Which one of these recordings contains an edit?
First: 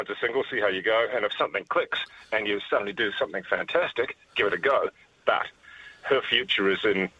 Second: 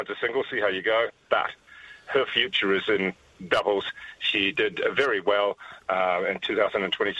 second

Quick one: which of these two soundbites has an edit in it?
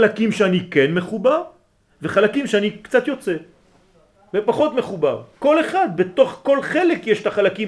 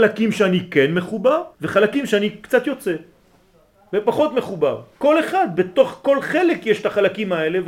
second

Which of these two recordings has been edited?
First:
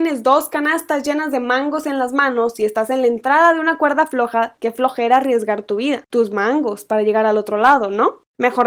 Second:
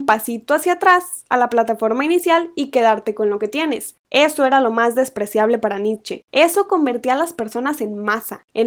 first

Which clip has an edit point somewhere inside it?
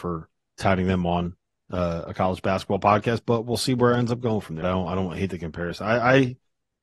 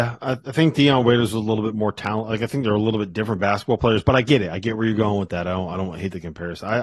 first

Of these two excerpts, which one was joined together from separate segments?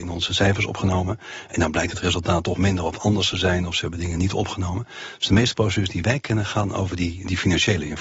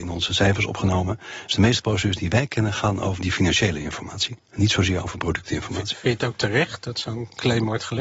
second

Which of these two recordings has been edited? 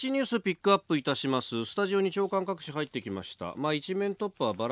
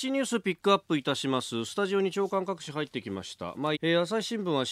second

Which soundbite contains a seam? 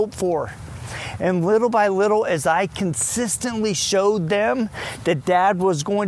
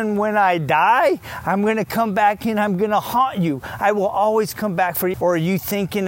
second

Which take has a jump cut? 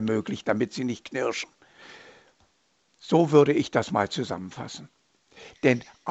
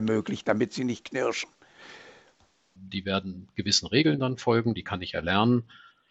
second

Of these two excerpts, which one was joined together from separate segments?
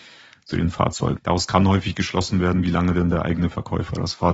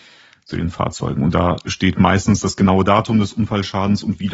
first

